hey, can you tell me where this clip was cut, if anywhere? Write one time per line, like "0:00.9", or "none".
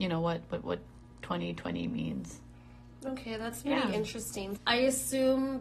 0:04.6